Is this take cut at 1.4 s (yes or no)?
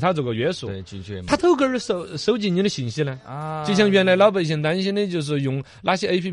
yes